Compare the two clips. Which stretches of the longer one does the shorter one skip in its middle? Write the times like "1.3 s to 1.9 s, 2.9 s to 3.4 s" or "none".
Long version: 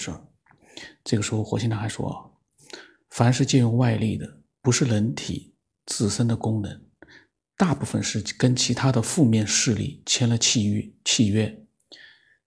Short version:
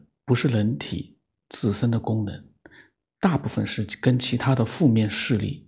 none